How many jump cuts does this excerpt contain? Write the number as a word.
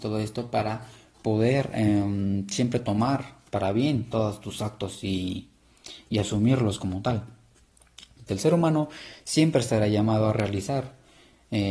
one